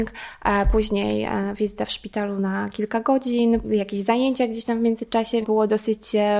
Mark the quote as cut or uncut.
cut